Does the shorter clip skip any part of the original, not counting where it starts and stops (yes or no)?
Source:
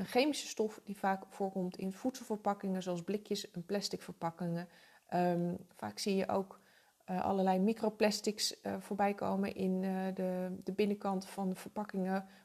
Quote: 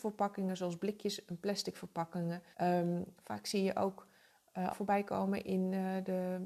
yes